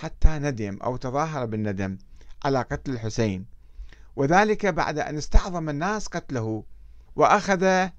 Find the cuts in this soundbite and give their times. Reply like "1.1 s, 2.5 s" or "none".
7.1 s